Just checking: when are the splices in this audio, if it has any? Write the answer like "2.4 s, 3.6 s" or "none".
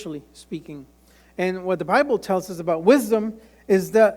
none